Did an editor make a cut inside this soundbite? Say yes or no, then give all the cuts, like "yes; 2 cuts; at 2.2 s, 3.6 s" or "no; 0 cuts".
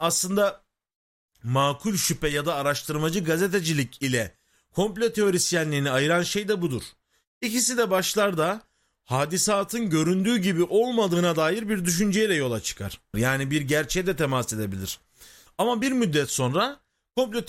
yes; 2 cuts; at 13.1 s, 15.5 s